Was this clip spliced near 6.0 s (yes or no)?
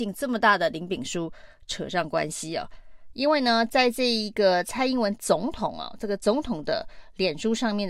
no